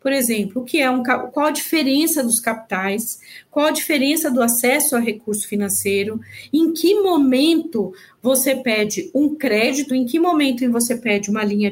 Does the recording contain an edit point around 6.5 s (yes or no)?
no